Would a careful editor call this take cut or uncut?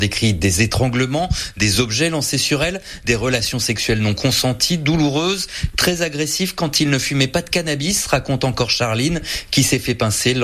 uncut